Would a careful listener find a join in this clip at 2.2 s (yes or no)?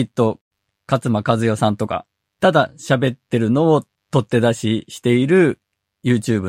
yes